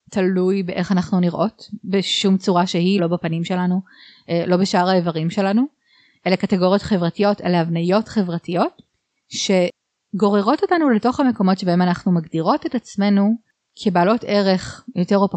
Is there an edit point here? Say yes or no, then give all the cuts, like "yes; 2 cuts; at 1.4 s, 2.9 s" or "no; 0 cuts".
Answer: yes; 1 cut; at 3.0 s